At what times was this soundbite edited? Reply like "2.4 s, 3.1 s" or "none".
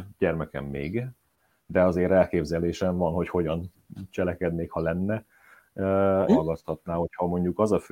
6.3 s